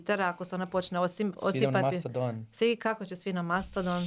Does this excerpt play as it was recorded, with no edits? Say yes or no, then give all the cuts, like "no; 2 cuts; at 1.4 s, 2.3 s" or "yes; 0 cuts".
yes; 0 cuts